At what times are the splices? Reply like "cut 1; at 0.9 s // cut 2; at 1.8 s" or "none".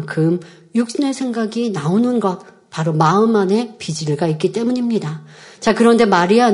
none